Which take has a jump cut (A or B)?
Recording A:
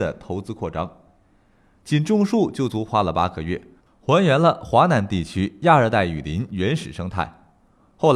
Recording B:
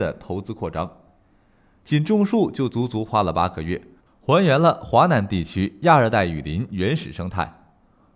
A